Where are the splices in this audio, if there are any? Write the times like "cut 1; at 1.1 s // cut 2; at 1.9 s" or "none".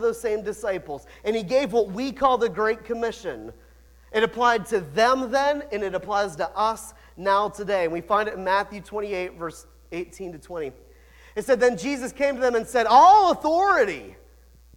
none